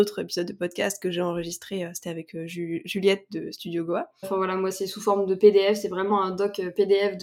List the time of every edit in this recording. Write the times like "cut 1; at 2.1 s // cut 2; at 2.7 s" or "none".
cut 1; at 4.2 s